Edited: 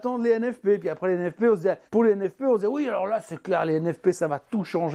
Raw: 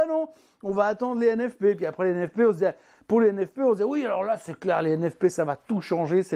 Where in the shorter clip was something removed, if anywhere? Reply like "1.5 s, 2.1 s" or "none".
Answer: 1.9 s